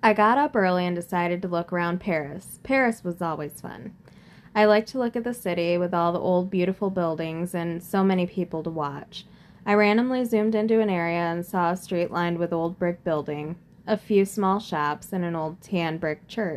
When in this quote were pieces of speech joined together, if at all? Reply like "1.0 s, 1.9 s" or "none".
none